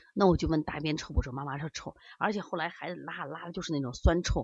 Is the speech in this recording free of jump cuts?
yes; 0 cuts

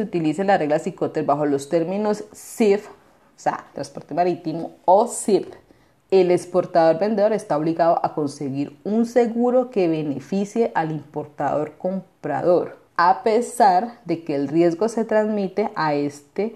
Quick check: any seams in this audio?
yes; 3 cuts; at 3.7 s, 5.9 s, 12.9 s

